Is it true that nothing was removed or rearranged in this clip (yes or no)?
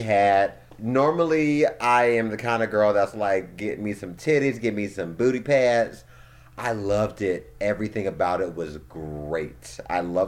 yes